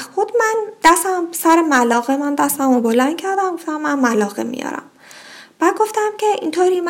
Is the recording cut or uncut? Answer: uncut